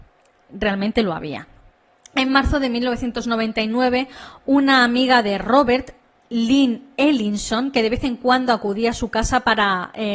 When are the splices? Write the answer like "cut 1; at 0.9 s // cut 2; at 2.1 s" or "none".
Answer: none